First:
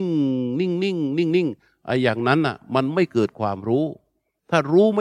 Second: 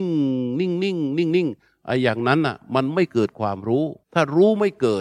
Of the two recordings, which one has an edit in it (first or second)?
second